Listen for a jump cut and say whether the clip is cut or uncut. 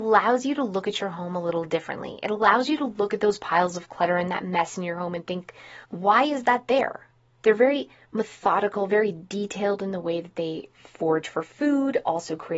cut